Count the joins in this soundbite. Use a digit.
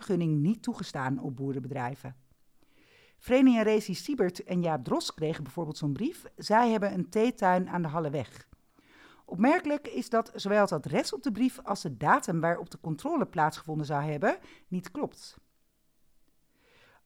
0